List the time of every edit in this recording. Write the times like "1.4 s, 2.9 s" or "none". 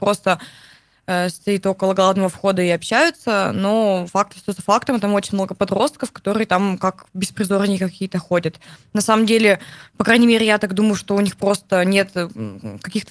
none